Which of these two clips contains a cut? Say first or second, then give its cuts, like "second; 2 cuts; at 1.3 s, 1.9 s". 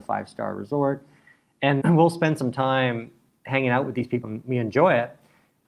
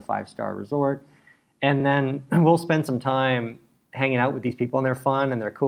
first; 2 cuts; at 1.8 s, 4.2 s